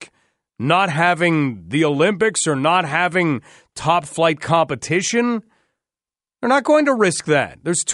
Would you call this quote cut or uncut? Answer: uncut